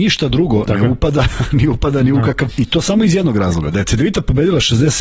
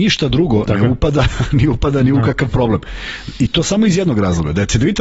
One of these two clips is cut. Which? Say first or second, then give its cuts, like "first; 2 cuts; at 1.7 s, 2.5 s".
first; 1 cut; at 2.5 s